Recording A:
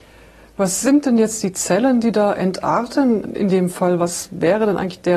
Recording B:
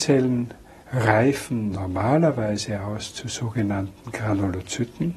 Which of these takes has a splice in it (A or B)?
A